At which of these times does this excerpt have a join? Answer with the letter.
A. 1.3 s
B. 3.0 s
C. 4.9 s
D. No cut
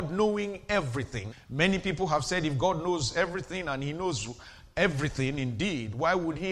A